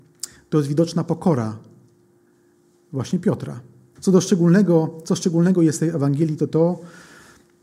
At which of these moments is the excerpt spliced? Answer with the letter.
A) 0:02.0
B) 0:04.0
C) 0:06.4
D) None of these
B